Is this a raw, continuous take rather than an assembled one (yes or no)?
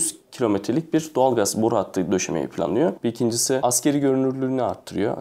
no